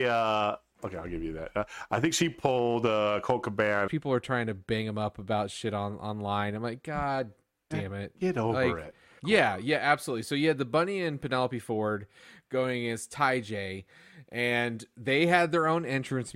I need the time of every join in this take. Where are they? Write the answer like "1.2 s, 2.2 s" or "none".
3.9 s, 9.2 s